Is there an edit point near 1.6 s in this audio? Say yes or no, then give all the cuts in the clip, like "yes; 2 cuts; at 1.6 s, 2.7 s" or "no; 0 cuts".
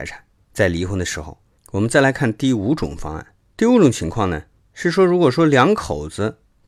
yes; 1 cut; at 1.6 s